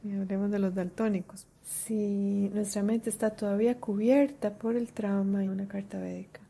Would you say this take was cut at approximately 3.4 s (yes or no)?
no